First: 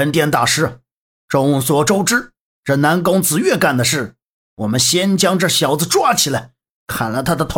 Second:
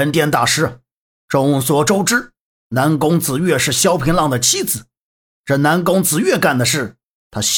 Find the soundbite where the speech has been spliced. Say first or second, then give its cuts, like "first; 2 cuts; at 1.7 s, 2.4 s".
first; 2 cuts; at 2.5 s, 4.5 s